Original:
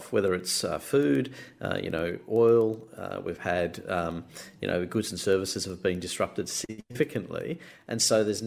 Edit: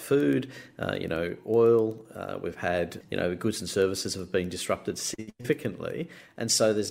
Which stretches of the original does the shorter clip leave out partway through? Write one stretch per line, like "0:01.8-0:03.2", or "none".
0:03.8-0:04.5